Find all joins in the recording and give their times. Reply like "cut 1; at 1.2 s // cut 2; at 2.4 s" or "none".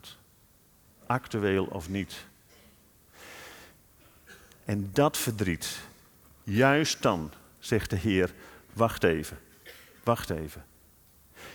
none